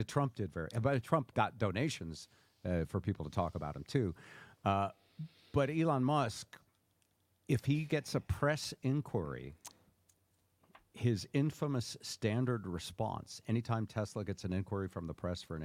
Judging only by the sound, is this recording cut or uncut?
uncut